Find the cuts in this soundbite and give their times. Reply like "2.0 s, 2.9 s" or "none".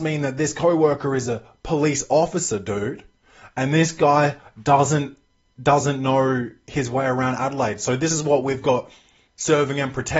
none